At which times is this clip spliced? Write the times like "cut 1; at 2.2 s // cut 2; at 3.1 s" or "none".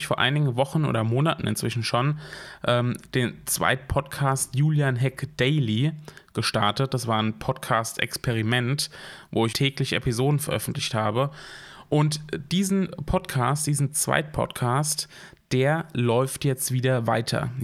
cut 1; at 9.5 s